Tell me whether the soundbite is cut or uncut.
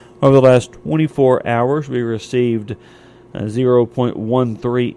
uncut